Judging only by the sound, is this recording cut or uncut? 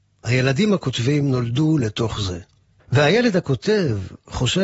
cut